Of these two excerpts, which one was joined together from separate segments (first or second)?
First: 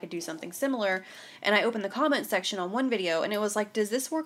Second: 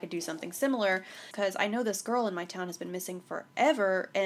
second